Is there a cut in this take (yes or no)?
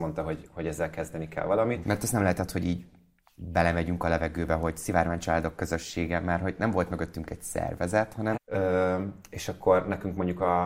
yes